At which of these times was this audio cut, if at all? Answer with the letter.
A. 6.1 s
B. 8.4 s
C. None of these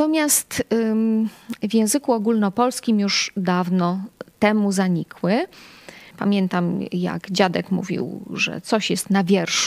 A